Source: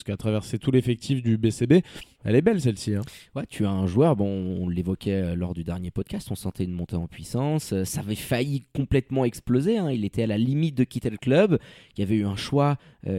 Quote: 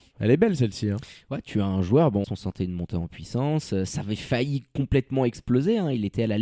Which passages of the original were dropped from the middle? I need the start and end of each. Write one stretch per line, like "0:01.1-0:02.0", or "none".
0:04.3-0:06.2